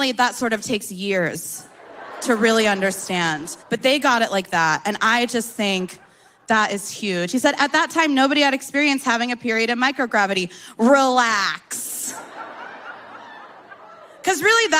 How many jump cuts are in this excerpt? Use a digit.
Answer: 1